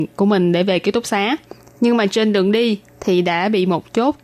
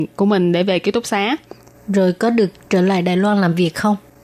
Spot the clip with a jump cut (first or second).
second